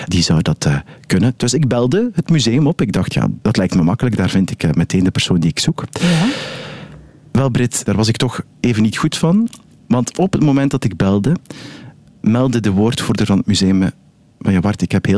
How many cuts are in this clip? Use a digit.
0